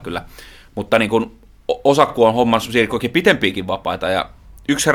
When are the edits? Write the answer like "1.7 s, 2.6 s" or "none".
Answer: none